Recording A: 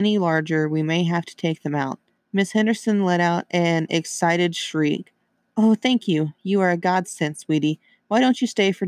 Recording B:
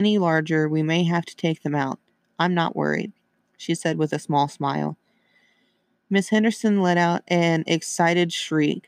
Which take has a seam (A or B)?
A